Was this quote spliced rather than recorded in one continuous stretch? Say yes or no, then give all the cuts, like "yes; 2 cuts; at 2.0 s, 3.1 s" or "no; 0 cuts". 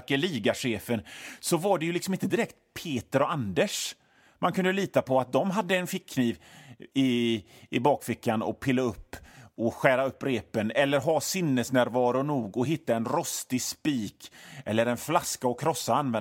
no; 0 cuts